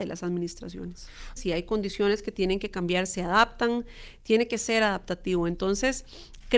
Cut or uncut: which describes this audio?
cut